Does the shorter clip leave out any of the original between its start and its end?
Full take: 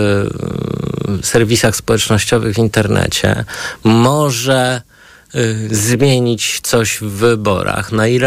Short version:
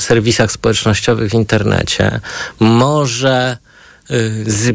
no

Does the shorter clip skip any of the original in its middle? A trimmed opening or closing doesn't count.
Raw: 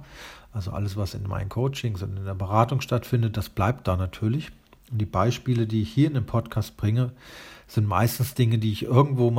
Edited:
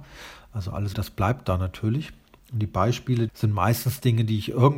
yes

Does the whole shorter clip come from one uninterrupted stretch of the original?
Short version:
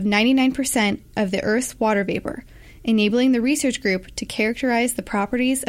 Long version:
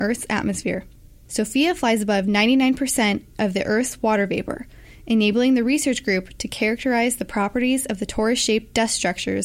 yes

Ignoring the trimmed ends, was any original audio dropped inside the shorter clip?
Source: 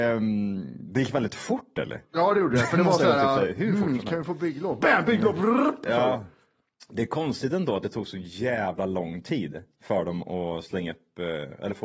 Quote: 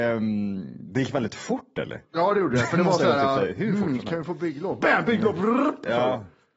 no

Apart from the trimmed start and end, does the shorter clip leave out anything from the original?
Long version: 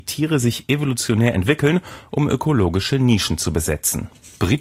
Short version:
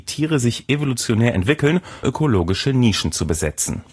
yes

